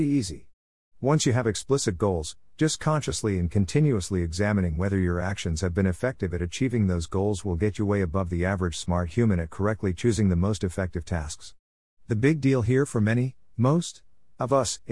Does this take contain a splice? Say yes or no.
no